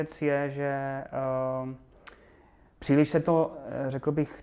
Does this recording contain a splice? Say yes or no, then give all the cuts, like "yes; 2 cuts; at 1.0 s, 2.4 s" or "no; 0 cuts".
no; 0 cuts